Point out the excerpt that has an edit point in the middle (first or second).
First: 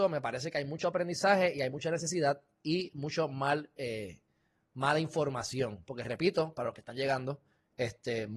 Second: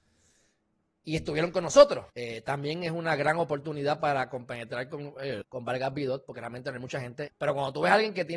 second